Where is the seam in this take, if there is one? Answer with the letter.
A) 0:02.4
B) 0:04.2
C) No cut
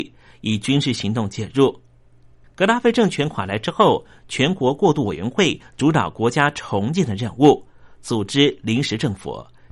A